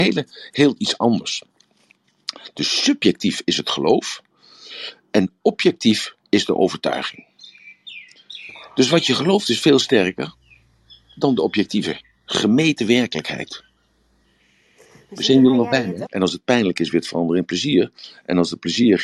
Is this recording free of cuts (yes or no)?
no